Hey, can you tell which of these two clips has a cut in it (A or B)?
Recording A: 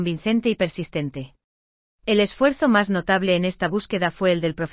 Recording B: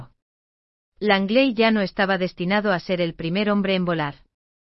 A